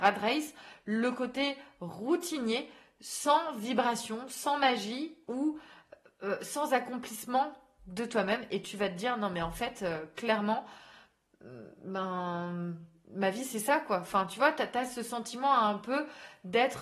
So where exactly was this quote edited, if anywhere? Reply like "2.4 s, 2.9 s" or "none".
none